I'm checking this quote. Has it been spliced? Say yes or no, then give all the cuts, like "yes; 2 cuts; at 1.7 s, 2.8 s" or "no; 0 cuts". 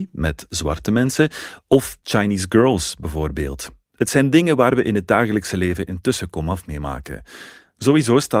no; 0 cuts